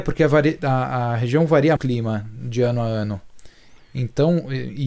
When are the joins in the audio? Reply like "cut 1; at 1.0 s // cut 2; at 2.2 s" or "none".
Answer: cut 1; at 1.8 s